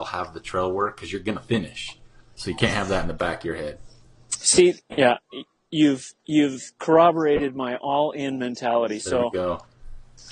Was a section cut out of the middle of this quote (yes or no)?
yes